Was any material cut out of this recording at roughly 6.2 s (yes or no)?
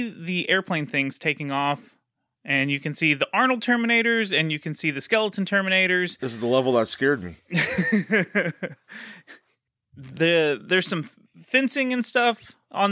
no